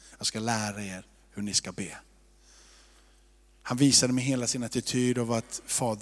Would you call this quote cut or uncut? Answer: uncut